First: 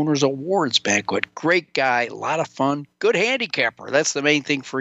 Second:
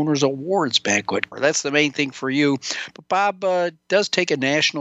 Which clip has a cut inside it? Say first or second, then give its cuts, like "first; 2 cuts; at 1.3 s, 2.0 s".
second; 1 cut; at 1.3 s